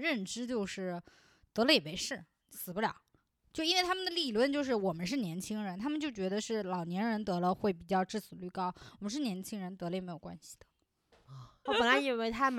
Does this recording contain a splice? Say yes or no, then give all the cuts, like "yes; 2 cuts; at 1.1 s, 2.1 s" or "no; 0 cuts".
yes; 1 cut; at 11.7 s